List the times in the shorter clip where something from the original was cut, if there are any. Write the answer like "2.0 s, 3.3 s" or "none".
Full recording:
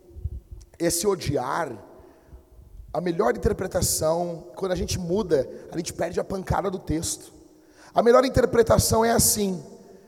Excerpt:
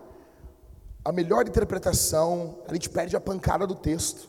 2.6 s